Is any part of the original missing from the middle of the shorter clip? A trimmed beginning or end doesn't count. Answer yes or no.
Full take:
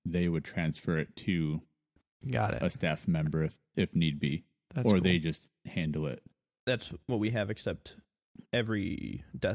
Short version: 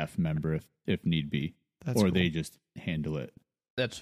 no